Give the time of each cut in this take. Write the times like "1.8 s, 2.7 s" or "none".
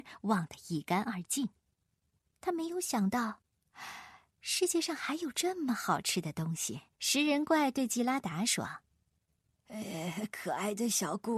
6.9 s